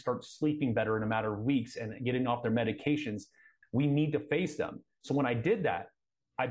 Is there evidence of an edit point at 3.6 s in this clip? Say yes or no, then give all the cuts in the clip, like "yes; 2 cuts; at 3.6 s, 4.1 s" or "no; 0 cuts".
yes; 1 cut; at 3.6 s